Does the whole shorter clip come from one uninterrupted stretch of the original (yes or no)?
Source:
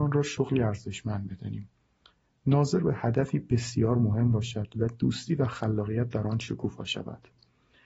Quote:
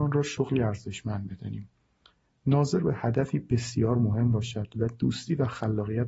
yes